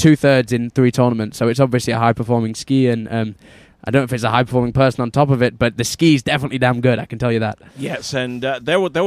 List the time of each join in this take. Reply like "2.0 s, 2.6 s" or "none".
none